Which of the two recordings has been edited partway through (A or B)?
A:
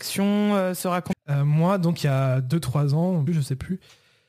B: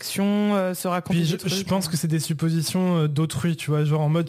A